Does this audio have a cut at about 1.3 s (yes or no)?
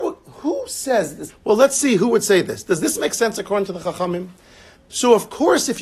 yes